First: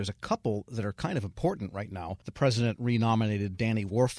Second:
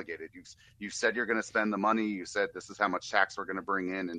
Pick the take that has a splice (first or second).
first